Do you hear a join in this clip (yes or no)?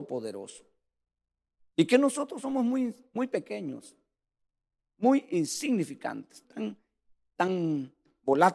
yes